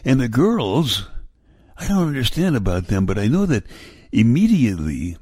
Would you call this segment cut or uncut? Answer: uncut